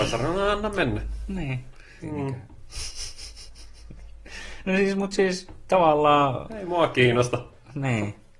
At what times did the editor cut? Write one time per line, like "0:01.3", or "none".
0:02.0